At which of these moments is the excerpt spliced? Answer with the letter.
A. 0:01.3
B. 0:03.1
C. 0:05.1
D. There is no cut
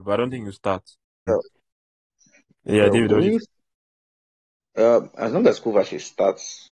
A